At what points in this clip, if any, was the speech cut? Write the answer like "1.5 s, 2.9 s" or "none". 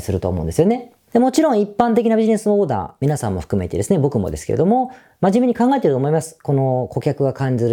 none